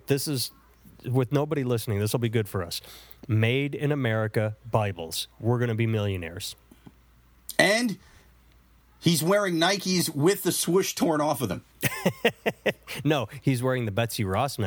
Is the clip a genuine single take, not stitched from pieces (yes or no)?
yes